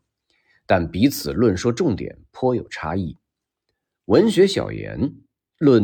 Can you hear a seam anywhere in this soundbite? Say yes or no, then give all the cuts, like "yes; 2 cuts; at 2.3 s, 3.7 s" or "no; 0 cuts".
no; 0 cuts